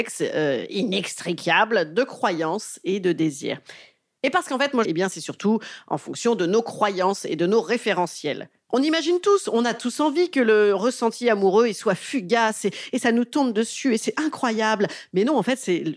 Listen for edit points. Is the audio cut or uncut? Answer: cut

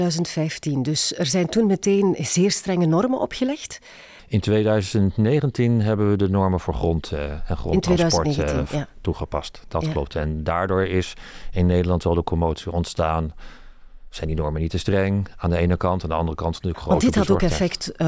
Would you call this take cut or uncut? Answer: uncut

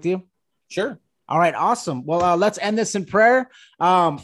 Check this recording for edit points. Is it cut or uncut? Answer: uncut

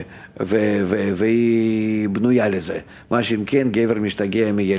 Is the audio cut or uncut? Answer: uncut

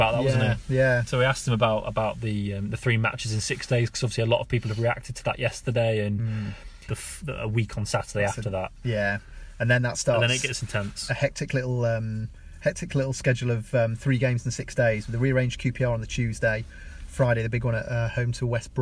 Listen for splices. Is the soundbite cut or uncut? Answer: cut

